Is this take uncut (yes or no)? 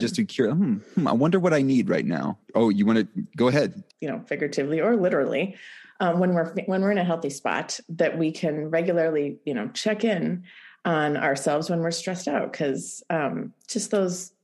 no